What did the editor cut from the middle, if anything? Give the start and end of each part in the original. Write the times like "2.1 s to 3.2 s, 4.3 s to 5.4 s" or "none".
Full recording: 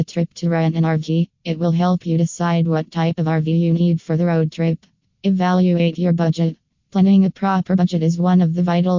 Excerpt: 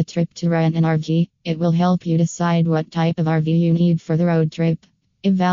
none

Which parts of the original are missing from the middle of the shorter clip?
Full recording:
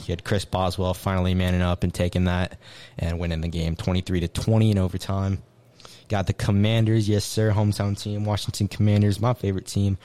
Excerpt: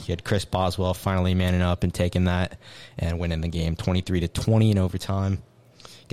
none

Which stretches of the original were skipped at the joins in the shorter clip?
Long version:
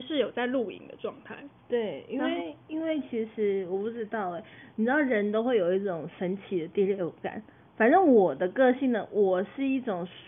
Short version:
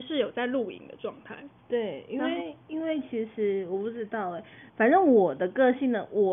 4.7 s to 7.7 s

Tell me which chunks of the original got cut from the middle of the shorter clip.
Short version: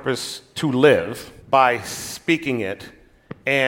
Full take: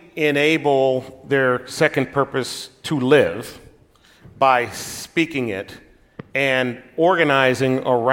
3.7 s to 4.3 s

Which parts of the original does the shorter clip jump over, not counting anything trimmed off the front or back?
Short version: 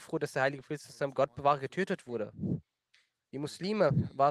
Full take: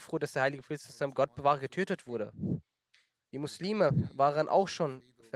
none

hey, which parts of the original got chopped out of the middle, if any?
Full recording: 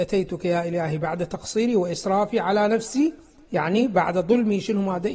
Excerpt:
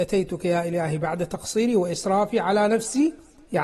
none

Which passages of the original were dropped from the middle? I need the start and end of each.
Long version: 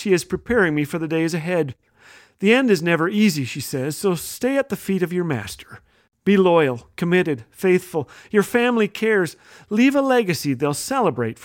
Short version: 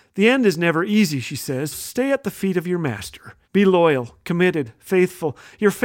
4.0 s to 4.2 s, 5.9 s to 6.2 s

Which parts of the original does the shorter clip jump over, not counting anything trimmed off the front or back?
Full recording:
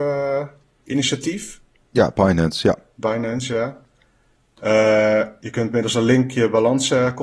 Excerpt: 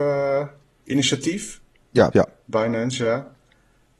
2.1 s to 2.6 s

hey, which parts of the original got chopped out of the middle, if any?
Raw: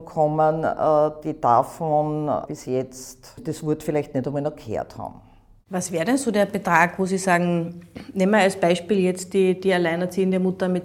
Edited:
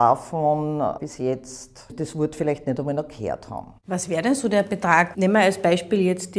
5.2 s to 5.6 s, 7.0 s to 8.1 s

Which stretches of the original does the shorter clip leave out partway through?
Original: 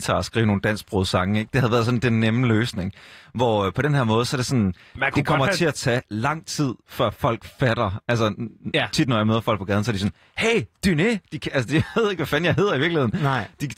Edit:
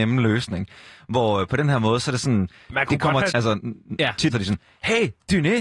5.5 s to 8.0 s, 9.1 s to 9.8 s

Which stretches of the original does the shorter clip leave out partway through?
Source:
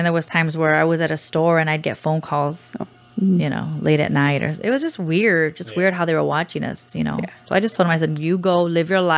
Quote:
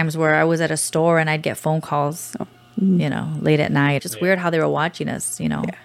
4.4 s to 5.5 s

